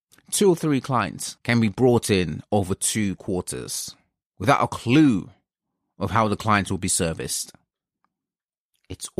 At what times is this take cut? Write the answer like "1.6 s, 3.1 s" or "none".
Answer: 1.4 s